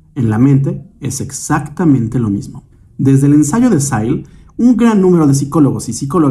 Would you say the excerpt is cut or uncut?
uncut